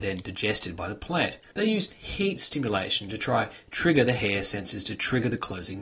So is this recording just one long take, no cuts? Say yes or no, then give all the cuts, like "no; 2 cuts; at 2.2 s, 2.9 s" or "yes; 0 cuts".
no; 1 cut; at 1.5 s